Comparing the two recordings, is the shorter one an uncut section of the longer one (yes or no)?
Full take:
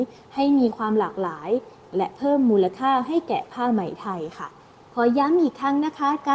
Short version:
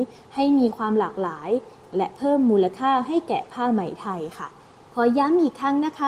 yes